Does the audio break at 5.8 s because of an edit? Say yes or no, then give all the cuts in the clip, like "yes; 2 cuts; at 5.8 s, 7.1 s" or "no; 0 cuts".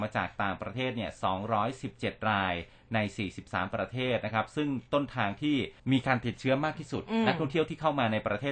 yes; 1 cut; at 5.8 s